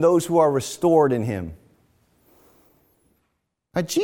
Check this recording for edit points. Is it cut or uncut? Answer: uncut